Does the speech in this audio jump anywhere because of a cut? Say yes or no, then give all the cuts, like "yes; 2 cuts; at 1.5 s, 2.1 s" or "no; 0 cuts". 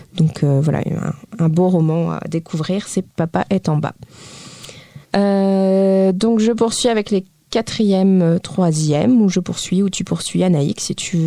yes; 1 cut; at 5.1 s